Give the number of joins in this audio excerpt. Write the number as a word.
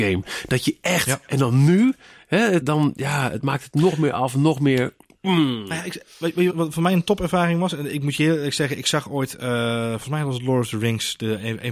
two